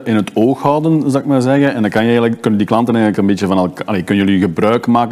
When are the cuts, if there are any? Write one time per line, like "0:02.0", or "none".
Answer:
none